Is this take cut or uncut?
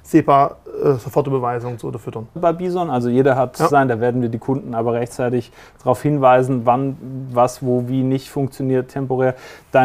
cut